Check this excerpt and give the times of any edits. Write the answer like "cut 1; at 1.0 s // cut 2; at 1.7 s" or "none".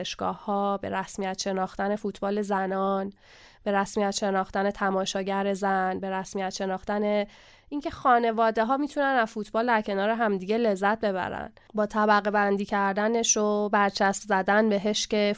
none